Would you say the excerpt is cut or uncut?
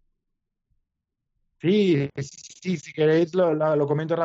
uncut